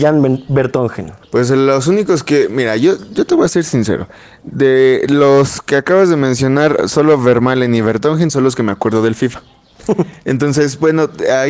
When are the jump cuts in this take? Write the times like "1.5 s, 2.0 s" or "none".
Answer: 1.2 s